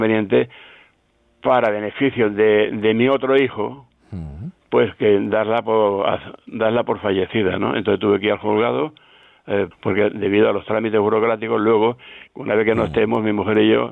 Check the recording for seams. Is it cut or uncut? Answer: cut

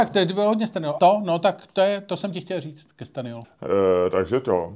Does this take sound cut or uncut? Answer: cut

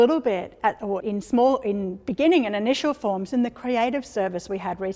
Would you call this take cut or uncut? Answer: cut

